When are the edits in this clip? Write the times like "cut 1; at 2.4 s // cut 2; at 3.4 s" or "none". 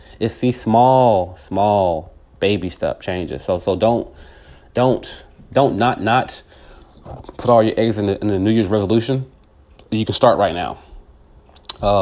none